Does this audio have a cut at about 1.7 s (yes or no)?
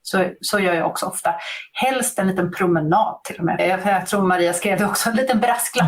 no